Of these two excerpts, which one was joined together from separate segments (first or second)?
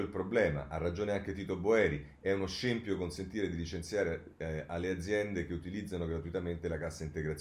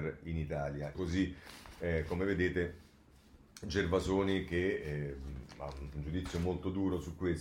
second